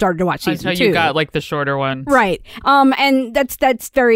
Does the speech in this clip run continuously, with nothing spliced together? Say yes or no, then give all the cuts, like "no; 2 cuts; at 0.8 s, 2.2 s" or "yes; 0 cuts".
no; 1 cut; at 2.6 s